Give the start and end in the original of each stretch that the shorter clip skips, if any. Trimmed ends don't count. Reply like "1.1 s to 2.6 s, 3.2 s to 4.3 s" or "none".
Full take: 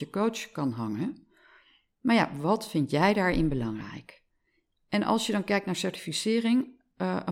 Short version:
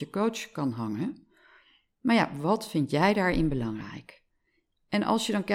none